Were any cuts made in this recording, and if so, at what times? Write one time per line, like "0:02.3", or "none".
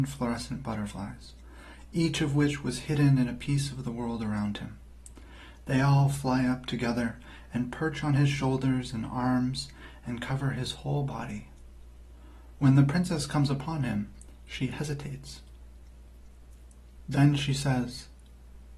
none